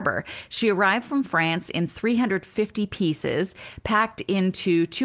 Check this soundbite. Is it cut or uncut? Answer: uncut